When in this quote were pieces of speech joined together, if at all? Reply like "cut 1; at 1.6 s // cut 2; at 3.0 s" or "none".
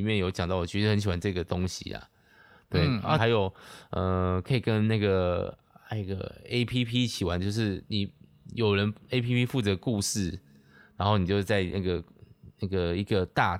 cut 1; at 3.2 s